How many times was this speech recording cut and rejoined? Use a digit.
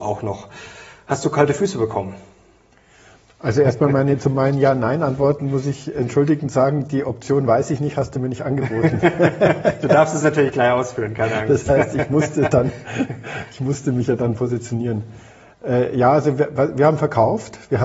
0